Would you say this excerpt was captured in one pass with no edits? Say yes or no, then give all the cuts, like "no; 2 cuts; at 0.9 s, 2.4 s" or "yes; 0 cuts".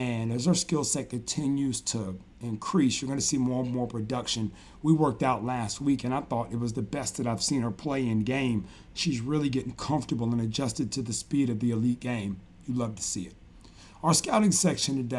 yes; 0 cuts